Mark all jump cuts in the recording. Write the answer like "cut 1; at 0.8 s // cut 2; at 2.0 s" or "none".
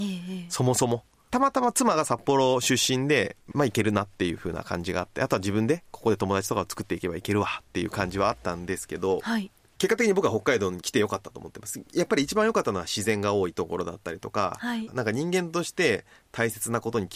cut 1; at 3.5 s // cut 2; at 14.9 s